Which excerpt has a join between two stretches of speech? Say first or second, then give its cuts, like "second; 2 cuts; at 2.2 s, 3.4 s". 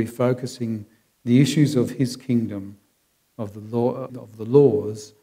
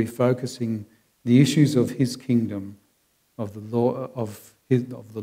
first; 1 cut; at 4.1 s